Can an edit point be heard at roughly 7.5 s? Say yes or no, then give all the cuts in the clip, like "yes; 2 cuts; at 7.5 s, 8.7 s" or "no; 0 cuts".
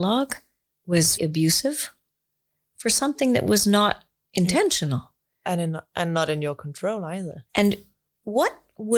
yes; 2 cuts; at 1.2 s, 7.5 s